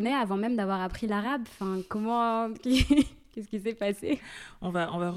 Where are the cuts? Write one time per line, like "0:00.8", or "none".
none